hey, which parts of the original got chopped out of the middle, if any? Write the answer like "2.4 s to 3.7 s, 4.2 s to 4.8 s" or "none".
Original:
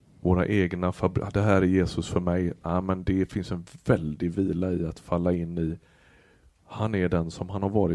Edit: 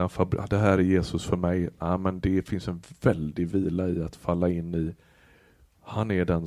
none